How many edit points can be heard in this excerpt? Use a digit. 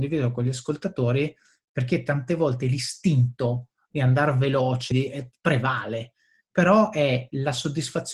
1